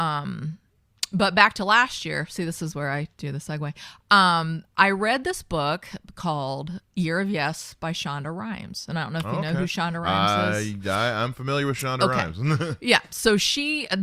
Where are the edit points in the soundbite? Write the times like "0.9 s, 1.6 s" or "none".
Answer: none